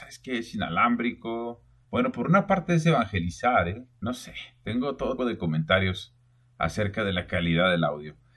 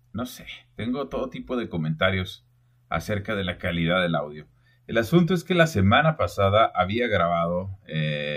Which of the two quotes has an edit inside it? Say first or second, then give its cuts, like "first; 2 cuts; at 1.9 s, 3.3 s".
first; 3 cuts; at 1.8 s, 4.0 s, 5.2 s